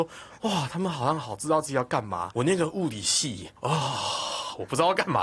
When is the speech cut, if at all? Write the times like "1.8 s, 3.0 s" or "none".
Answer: 3.6 s